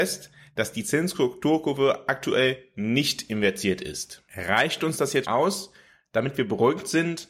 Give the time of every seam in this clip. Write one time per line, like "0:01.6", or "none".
0:05.2